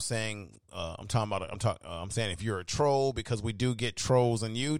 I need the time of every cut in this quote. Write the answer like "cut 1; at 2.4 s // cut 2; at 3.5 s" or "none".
none